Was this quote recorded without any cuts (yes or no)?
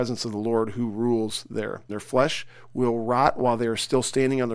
no